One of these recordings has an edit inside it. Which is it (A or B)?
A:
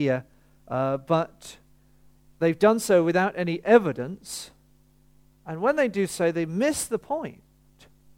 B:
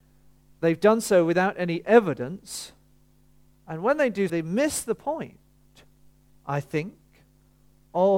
B